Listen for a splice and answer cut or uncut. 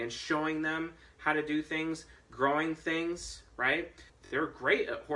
cut